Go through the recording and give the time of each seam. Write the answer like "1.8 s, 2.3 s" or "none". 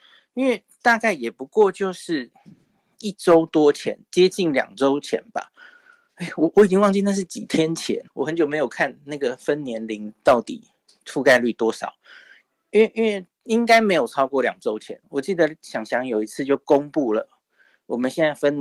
8.1 s